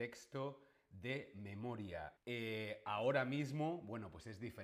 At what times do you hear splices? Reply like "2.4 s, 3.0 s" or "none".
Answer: 2.2 s

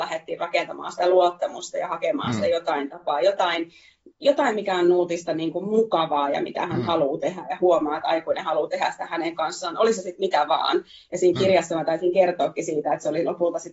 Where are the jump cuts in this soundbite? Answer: none

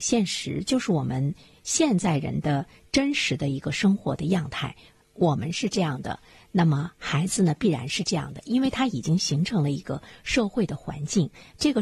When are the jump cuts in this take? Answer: none

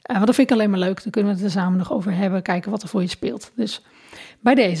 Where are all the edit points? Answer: none

